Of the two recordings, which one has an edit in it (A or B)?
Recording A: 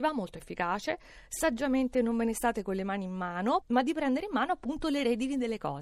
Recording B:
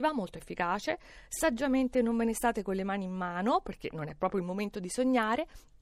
A